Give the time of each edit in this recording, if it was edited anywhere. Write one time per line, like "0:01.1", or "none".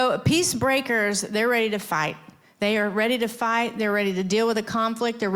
none